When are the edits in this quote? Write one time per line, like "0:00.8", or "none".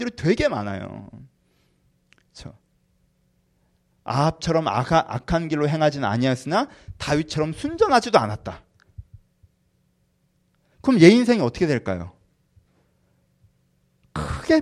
none